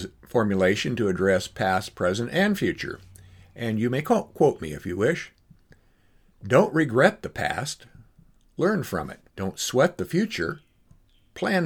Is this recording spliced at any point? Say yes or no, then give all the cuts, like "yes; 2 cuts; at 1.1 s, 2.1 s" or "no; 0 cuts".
yes; 1 cut; at 9.3 s